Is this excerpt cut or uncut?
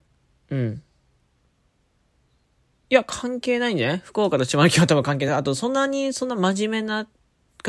uncut